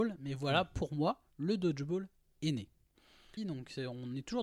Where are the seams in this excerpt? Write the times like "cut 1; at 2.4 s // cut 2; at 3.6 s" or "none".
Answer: cut 1; at 3.4 s